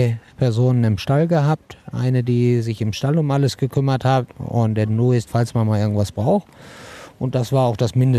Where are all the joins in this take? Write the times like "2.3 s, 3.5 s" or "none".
5.3 s